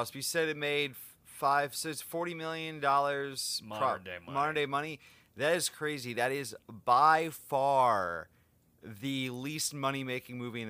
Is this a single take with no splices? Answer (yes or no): yes